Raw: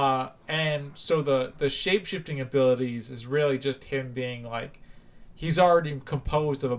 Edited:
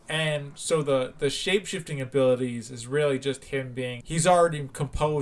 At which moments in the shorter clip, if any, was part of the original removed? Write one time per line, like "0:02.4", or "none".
0:04.0